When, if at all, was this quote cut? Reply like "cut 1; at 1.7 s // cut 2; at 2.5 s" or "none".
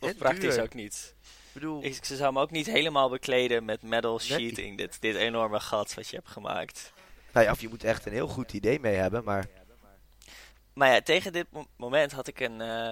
cut 1; at 10.6 s // cut 2; at 11.7 s